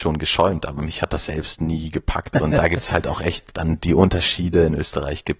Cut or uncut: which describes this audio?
cut